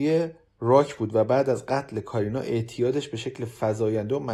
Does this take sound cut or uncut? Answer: uncut